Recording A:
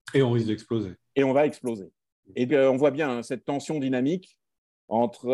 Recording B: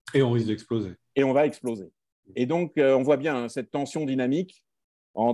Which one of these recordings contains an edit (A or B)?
A